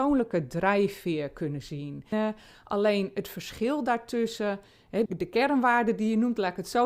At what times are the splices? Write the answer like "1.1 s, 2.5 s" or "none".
2.1 s, 5.1 s